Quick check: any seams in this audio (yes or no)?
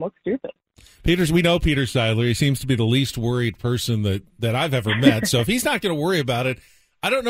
no